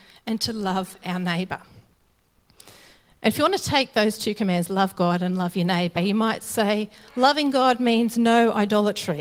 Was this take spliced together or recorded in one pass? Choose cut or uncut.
cut